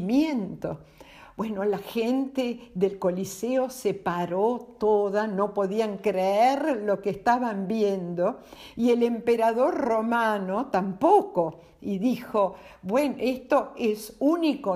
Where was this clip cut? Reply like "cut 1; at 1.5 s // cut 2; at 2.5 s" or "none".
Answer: none